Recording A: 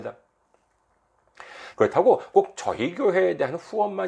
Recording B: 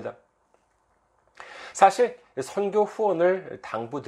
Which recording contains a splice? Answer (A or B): A